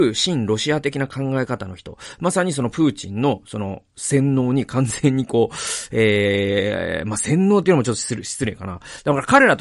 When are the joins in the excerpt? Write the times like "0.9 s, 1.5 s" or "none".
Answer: none